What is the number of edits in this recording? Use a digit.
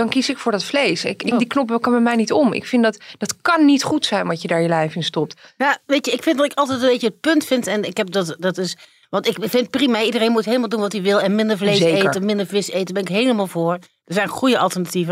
1